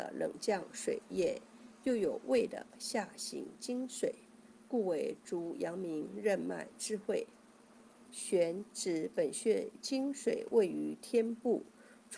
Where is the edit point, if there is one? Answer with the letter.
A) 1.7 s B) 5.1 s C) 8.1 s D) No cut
C